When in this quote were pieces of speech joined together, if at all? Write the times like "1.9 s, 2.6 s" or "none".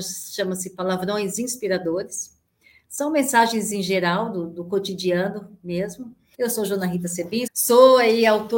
6.3 s, 7.5 s